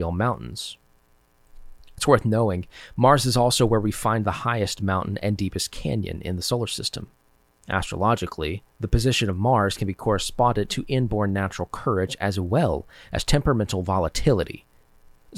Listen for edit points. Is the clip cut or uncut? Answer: cut